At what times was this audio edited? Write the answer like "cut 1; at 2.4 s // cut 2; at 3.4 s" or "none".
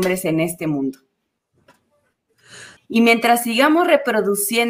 cut 1; at 2.8 s